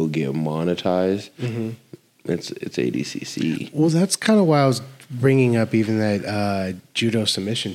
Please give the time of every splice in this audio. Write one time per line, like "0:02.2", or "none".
none